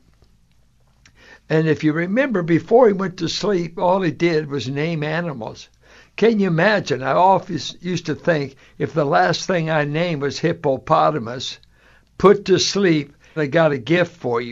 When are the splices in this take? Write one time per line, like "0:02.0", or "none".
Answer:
0:13.4